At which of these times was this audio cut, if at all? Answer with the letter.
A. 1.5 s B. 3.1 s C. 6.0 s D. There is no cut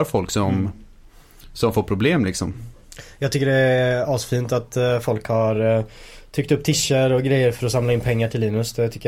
D